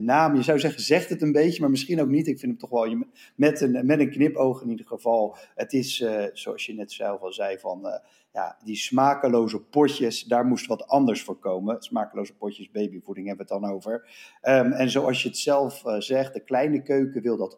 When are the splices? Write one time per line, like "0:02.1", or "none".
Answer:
none